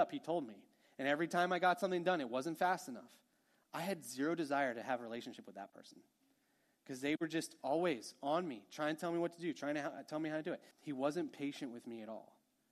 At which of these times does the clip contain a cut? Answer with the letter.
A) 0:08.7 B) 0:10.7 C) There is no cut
B